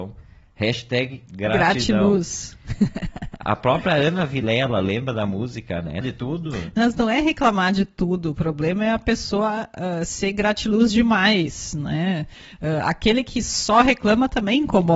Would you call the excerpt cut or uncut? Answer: cut